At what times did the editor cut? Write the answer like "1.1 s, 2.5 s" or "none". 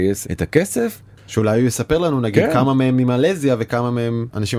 1.2 s